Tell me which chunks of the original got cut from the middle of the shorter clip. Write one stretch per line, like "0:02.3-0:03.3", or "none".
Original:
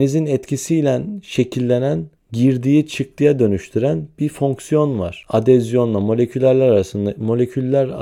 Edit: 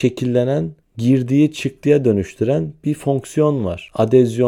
none